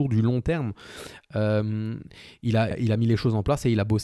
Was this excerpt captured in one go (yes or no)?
no